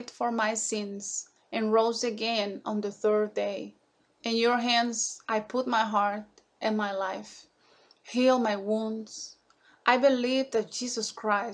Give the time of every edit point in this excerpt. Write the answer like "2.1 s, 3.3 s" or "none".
4.0 s